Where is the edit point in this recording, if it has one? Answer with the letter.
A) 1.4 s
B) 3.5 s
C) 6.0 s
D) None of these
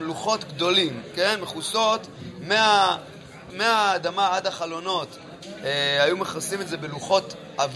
B